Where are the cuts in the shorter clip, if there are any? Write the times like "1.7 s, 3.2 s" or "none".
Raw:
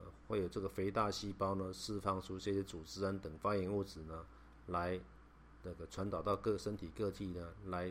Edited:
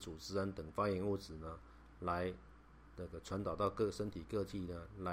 none